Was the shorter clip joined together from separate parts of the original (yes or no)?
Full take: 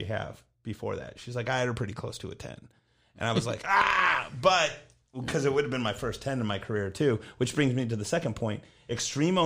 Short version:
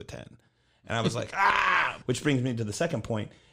yes